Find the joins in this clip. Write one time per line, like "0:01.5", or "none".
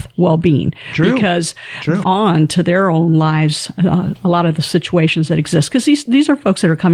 0:02.0